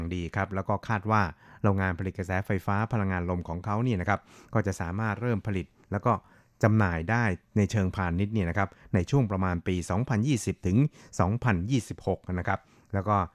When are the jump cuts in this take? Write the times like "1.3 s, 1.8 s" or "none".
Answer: none